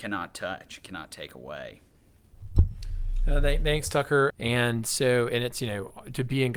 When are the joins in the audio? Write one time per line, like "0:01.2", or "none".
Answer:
0:04.3

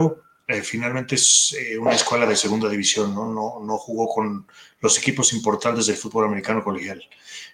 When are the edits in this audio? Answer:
none

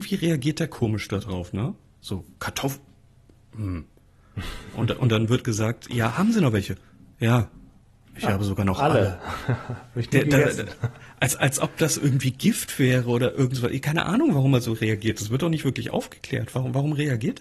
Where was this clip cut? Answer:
none

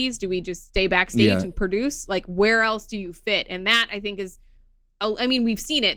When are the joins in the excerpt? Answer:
none

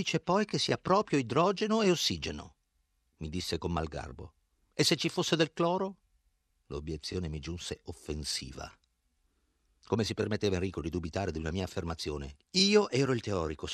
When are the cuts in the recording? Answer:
0:06.5

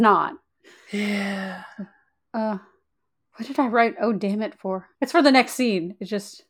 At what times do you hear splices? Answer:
0:04.9

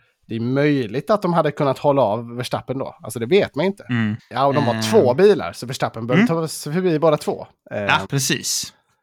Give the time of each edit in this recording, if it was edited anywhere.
0:04.2
0:08.0

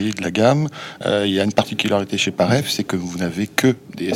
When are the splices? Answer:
none

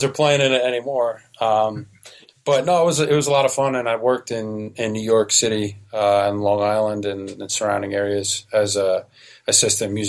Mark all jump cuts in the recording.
none

